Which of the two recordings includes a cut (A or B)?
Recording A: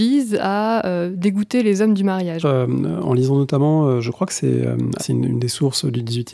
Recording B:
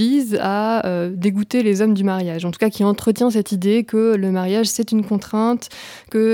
A